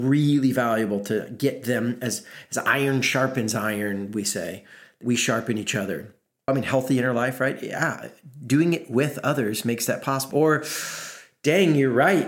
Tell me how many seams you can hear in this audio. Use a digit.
2